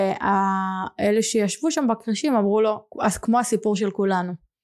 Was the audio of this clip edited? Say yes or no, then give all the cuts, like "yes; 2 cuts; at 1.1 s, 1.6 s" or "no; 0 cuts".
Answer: yes; 1 cut; at 2.9 s